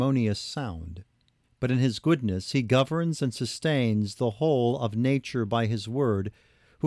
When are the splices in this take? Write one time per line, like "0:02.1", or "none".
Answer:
0:01.4